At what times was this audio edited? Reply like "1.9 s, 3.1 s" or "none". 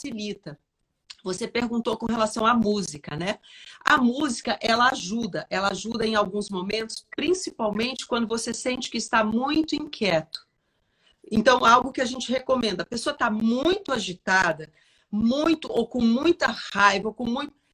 none